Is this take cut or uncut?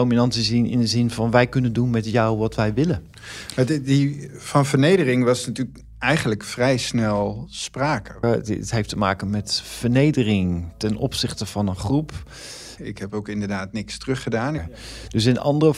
cut